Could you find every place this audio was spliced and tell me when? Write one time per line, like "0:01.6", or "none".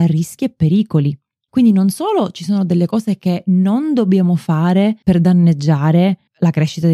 none